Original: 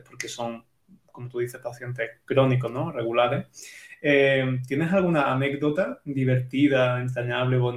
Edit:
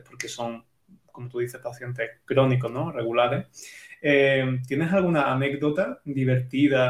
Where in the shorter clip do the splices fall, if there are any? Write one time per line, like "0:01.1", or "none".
none

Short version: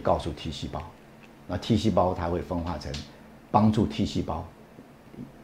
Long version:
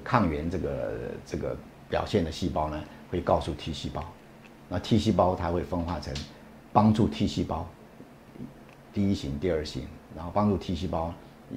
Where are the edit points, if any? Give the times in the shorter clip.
none

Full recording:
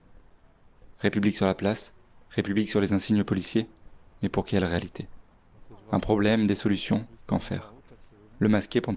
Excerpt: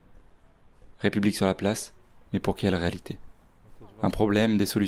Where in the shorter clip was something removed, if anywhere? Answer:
0:02.3

